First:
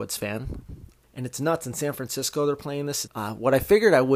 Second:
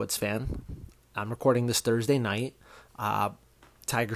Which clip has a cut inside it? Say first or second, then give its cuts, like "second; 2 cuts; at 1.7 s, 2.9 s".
first; 2 cuts; at 1.0 s, 3.1 s